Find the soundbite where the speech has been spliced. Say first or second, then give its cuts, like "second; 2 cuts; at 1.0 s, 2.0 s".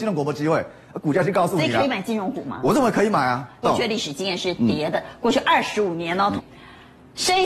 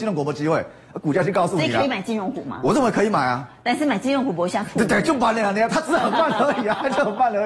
first; 2 cuts; at 3.6 s, 6.4 s